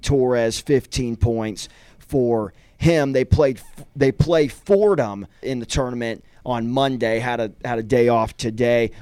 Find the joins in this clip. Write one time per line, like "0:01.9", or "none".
0:05.4